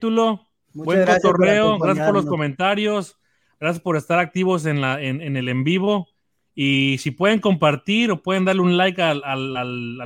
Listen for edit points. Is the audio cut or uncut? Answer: uncut